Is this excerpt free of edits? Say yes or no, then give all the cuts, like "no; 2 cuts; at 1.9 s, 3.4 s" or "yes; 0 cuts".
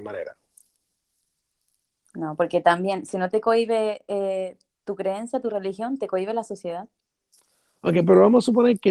yes; 0 cuts